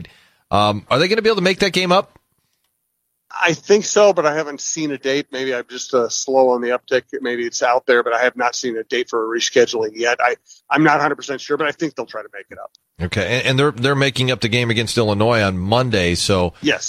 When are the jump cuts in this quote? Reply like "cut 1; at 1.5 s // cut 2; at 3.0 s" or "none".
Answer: none